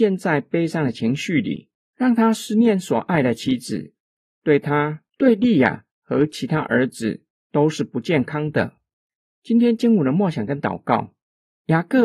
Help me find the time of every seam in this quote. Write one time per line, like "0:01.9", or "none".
0:05.1
0:09.2